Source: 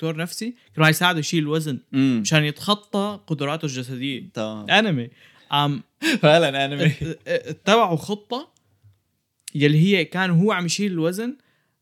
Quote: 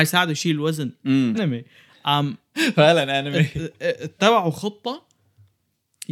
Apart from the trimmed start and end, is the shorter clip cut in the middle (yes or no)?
yes